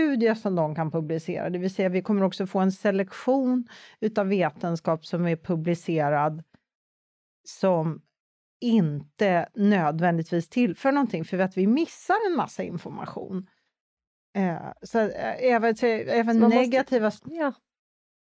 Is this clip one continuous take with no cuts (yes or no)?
no